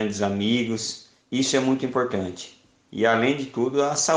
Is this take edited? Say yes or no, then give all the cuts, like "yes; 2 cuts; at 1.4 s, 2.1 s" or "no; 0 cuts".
no; 0 cuts